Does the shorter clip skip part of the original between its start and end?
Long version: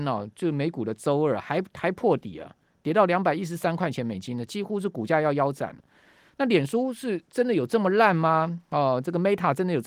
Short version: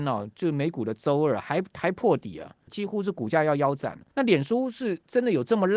yes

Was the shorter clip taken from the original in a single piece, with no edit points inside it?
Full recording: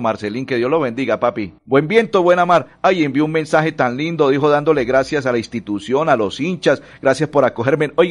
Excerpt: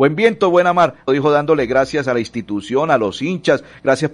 no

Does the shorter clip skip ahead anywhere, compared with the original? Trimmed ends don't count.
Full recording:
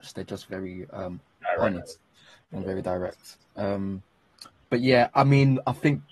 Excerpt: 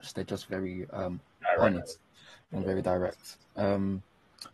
no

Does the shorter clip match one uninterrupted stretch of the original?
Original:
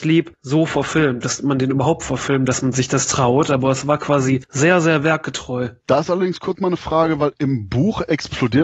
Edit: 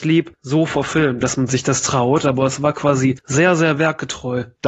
no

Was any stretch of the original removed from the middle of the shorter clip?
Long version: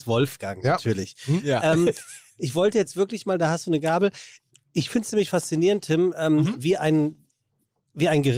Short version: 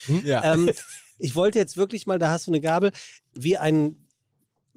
yes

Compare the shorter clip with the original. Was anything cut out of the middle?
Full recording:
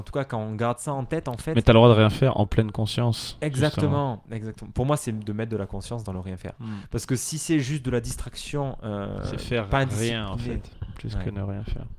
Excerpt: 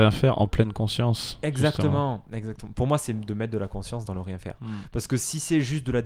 no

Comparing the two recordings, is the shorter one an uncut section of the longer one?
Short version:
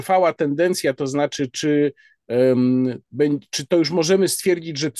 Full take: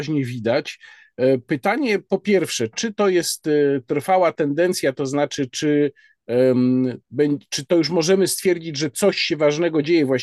yes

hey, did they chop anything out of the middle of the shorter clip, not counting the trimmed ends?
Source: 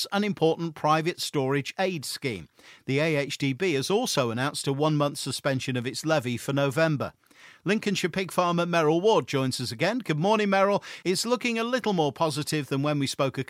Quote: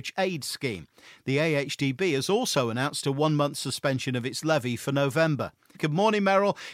yes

